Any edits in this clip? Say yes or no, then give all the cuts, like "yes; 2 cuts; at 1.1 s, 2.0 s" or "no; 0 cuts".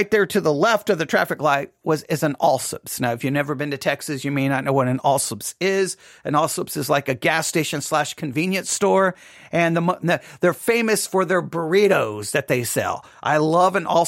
no; 0 cuts